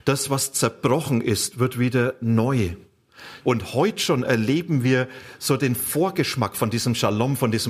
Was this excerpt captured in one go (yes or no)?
no